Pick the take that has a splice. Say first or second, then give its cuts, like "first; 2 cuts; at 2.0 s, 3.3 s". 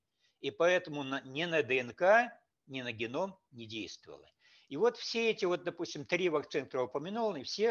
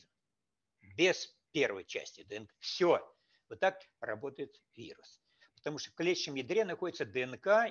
second; 2 cuts; at 2.5 s, 5.4 s